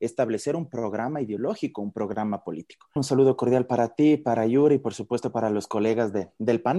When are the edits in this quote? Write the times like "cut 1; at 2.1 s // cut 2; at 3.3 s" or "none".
cut 1; at 3.0 s